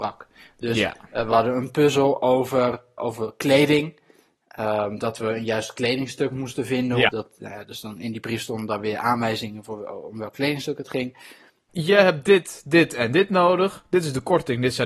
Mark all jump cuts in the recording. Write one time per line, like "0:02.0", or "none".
0:03.0
0:07.1
0:11.7